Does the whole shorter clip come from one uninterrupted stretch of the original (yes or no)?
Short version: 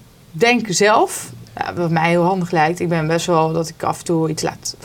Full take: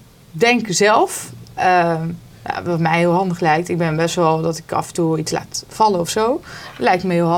no